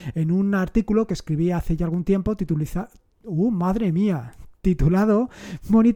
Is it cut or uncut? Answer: uncut